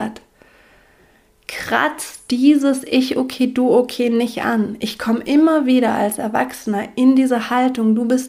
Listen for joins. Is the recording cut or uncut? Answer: uncut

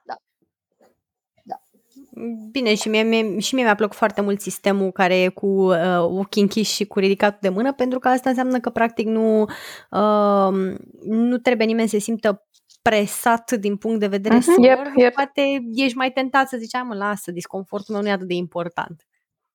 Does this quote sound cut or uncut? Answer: cut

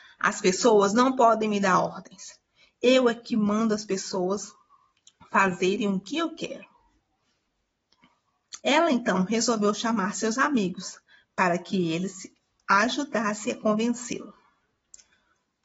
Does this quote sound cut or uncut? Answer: cut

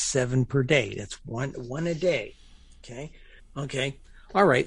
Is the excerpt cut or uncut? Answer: cut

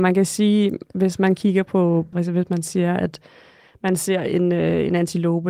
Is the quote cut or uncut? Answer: cut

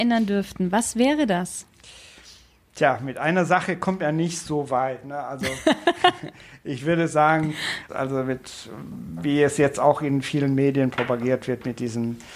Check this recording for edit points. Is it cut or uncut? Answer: cut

